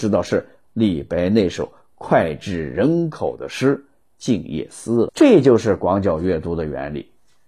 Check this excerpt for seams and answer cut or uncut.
cut